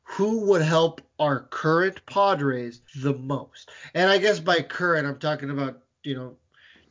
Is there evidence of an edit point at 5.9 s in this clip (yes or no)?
no